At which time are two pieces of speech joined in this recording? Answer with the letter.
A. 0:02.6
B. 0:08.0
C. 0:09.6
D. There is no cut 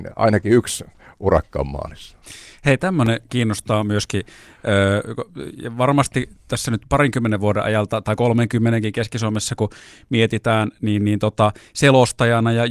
D